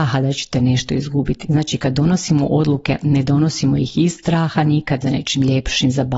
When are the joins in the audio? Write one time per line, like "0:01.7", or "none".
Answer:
0:01.4
0:05.0